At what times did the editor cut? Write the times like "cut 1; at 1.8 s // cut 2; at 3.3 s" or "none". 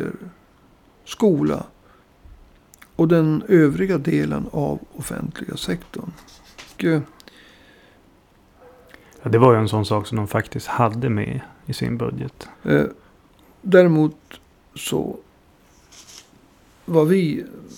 cut 1; at 6.8 s // cut 2; at 12.5 s